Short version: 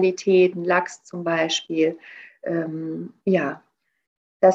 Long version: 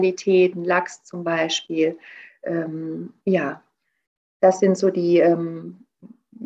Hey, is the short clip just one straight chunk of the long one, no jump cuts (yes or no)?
yes